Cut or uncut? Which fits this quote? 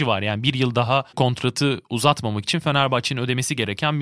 cut